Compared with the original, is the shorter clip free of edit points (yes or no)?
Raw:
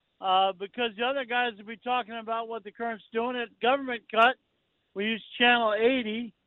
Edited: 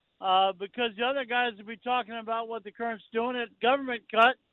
yes